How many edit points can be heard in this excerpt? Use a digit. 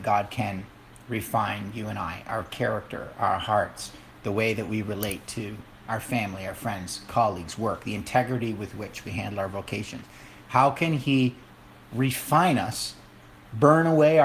0